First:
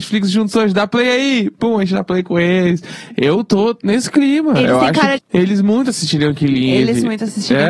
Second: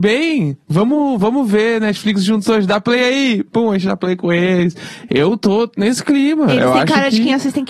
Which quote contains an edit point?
first; 1 cut; at 5.2 s

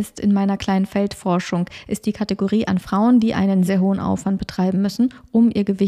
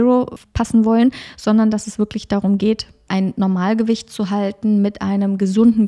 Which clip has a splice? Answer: first; 1 cut; at 3.7 s

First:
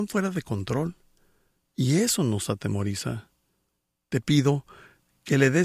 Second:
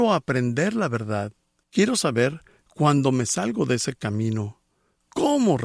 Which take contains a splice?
second; 1 cut; at 1.6 s

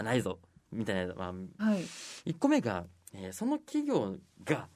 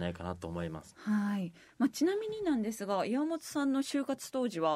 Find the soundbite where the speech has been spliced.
first; 1 cut; at 1.6 s

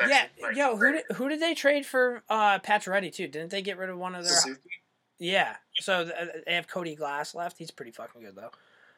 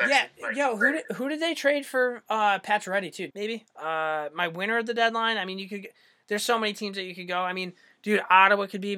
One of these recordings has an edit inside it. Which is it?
second; 1 cut; at 3.3 s

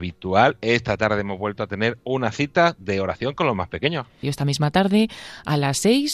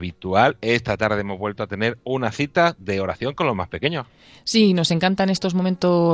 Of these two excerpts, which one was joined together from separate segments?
first; 1 cut; at 4.2 s

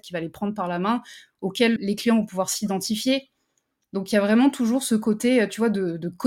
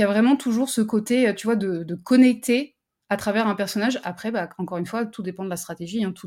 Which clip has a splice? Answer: first; 1 cut; at 1.8 s

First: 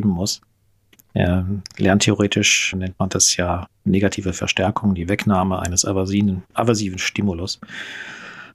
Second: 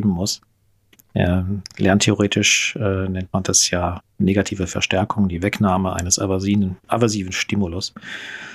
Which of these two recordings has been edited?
first; 1 cut; at 2.7 s

